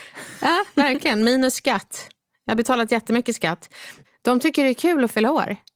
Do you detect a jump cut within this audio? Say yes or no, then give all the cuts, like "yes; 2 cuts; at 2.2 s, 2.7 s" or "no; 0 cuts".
yes; 1 cut; at 4.0 s